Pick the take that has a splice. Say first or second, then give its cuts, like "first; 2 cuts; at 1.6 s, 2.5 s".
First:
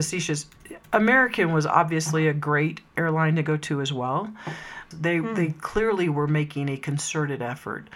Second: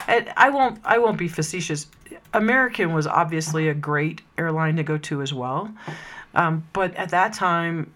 first; 1 cut; at 4.9 s